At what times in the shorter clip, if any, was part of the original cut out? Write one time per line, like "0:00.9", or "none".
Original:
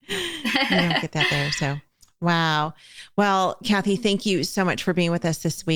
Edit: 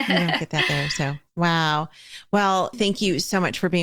0:01.3
0:02.7